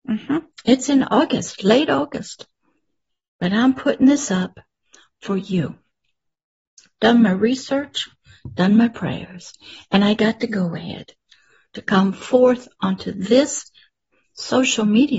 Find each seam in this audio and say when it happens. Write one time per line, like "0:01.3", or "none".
none